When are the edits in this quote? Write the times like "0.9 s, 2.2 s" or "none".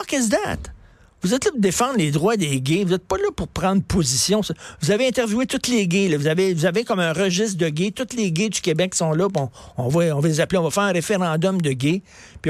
none

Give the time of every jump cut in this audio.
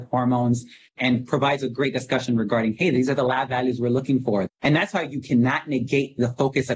4.5 s

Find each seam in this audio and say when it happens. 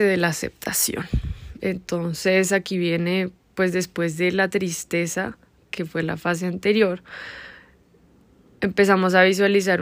none

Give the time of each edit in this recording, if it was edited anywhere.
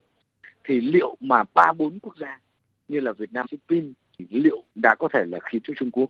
3.4 s

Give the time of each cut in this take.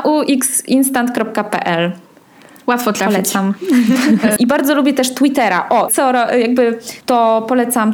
4.4 s, 5.9 s, 7.0 s

